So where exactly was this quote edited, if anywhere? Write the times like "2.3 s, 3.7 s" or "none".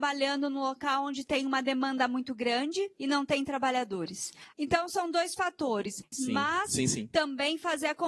4.5 s, 6.1 s